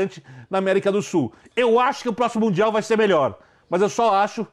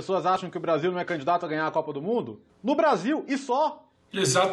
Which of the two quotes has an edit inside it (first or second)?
second